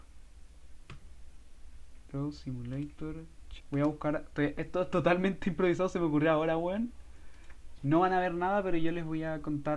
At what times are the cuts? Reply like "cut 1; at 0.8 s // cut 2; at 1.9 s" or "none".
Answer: cut 1; at 3.6 s // cut 2; at 7.8 s